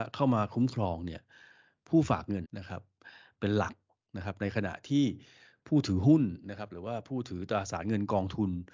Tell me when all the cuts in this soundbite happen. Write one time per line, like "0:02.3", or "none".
0:02.4